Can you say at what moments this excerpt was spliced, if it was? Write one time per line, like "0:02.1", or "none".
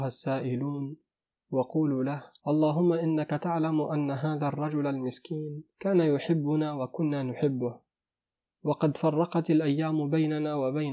0:02.4
0:05.7